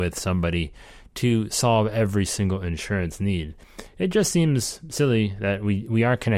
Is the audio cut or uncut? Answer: uncut